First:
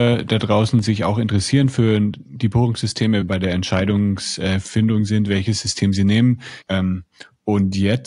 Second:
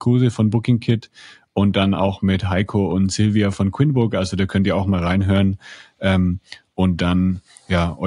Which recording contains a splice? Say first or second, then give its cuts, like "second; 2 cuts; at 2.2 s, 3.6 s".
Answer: first; 2 cuts; at 3.2 s, 6.6 s